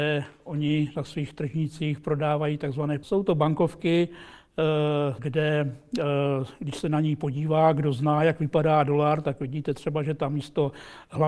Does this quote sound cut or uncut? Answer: cut